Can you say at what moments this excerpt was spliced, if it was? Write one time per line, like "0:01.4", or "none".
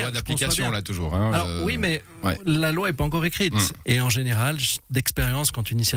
0:03.8